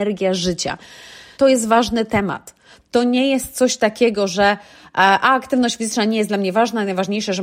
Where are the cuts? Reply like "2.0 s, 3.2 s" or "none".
1.3 s